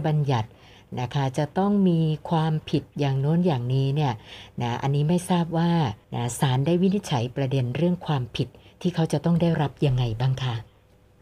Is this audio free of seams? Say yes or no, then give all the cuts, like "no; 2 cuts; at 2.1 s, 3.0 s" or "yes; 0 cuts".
no; 1 cut; at 6.0 s